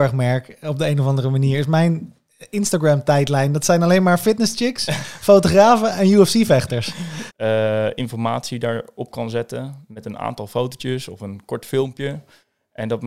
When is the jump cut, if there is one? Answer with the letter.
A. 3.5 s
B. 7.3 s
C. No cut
B